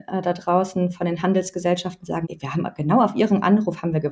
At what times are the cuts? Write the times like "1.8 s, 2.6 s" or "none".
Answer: 2.2 s